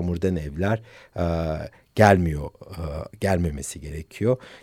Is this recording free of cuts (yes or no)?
yes